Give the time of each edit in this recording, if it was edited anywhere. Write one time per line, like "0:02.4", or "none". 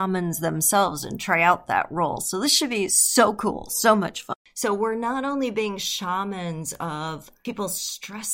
none

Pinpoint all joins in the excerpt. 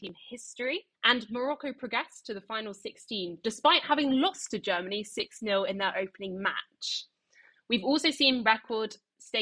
0:00.9

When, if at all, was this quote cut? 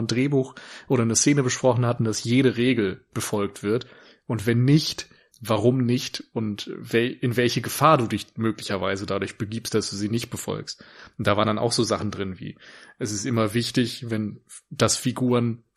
0:02.0
0:05.3

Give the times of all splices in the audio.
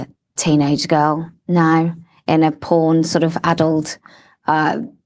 none

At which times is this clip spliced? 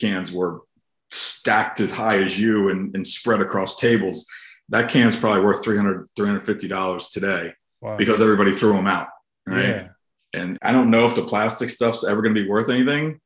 0:10.6

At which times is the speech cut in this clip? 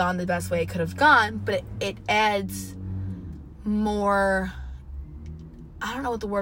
none

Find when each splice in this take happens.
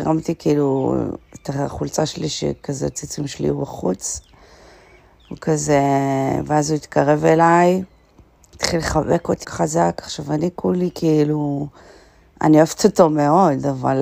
0:09.4

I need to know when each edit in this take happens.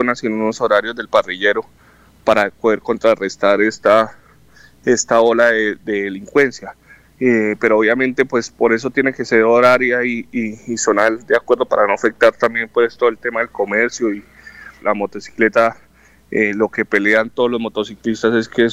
0:14.8

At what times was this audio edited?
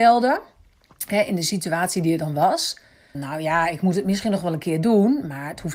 0:03.1

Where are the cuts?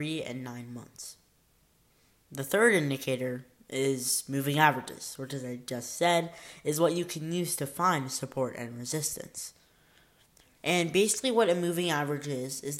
0:10.6

